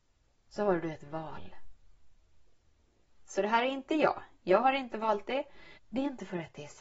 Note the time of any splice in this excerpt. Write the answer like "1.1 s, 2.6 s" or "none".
3.3 s, 5.8 s